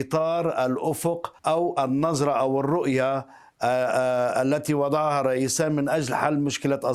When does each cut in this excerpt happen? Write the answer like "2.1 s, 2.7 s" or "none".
1.4 s